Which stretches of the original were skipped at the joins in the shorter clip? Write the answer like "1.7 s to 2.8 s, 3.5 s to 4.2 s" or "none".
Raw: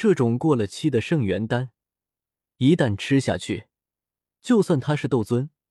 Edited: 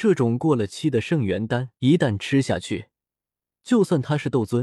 1.8 s to 2.5 s